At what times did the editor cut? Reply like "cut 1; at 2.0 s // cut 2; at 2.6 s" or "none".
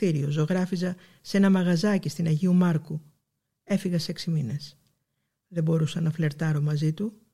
cut 1; at 5.3 s